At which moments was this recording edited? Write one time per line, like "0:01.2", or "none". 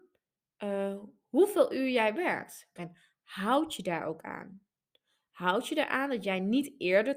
0:02.8